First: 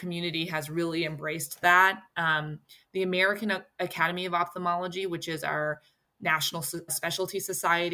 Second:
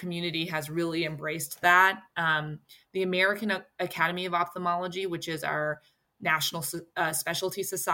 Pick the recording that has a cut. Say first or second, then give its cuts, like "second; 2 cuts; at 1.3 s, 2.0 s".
first; 1 cut; at 6.9 s